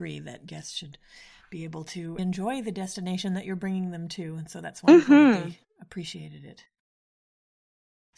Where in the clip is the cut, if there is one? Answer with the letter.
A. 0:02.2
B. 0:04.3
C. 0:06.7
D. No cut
A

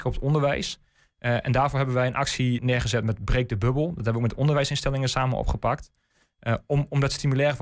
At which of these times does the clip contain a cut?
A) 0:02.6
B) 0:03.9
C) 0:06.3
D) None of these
A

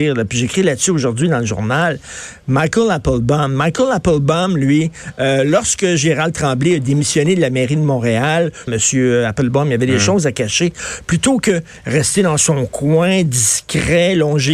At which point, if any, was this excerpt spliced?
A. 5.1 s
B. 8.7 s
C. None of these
B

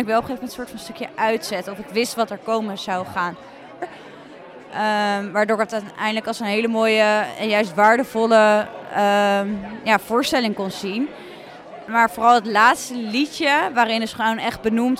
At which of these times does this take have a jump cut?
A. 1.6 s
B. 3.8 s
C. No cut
B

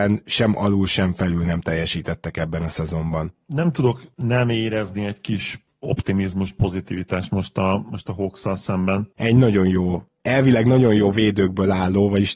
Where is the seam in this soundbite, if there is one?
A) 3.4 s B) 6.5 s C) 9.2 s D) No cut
C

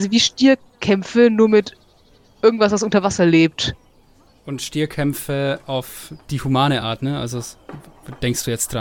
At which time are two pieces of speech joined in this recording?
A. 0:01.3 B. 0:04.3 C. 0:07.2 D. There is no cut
B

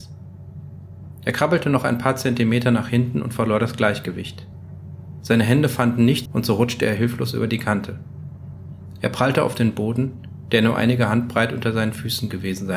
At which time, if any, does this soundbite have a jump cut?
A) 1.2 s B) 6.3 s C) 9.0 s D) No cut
B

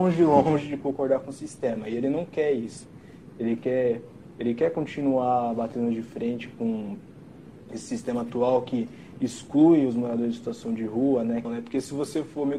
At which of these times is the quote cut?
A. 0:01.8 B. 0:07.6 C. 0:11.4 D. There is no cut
C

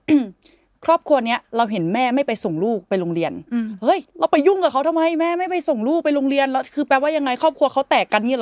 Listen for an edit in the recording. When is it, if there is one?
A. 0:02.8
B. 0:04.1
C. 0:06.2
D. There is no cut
B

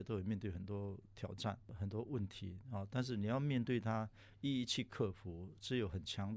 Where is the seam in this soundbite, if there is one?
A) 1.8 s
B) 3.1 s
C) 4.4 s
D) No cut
D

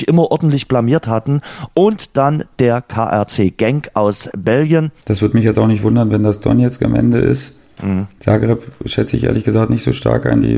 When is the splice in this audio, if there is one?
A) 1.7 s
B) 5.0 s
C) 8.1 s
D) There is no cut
B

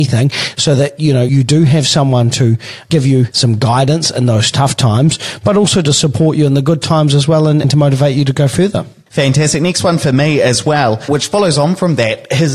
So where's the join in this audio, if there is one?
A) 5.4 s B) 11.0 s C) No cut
C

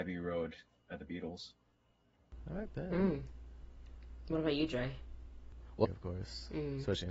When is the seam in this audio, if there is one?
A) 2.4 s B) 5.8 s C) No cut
B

